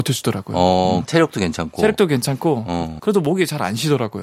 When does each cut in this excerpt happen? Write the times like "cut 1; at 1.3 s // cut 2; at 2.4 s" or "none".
cut 1; at 1.0 s // cut 2; at 3.0 s